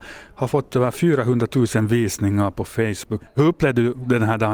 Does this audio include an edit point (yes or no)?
yes